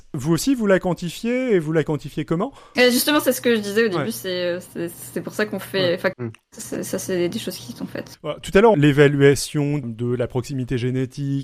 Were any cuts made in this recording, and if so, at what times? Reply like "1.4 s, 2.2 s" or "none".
6.1 s, 8.7 s, 9.8 s